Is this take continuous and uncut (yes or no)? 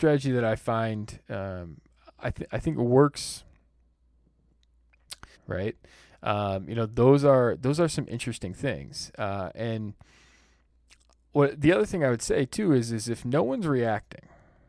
no